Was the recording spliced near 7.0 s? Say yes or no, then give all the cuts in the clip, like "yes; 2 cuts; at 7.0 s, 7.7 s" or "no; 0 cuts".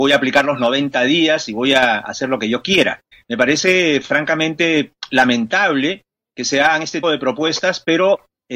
yes; 2 cuts; at 3.1 s, 7.0 s